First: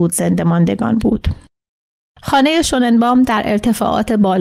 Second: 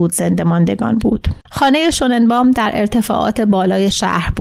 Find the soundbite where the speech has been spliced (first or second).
second